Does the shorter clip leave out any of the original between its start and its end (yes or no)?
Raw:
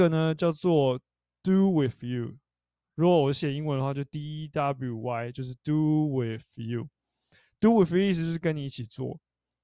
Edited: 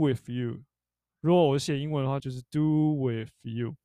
yes